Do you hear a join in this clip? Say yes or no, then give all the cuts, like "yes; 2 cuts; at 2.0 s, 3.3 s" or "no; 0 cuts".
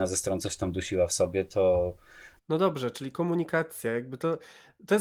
yes; 1 cut; at 2.4 s